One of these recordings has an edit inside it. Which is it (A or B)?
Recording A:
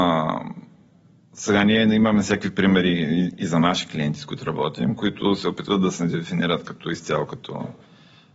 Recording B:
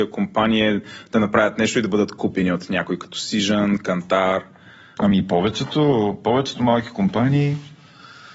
B